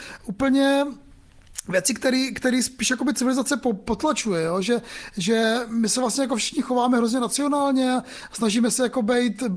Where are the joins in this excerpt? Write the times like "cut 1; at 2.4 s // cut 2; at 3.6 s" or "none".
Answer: none